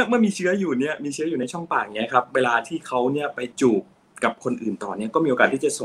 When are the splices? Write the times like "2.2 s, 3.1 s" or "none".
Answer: 3.5 s